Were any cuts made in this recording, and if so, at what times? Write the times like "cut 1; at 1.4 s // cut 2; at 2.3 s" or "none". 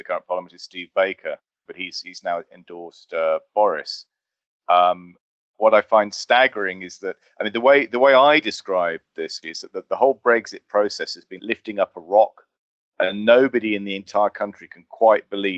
cut 1; at 1.7 s // cut 2; at 9.4 s // cut 3; at 11.4 s